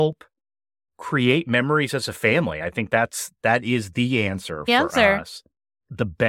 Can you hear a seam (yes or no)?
no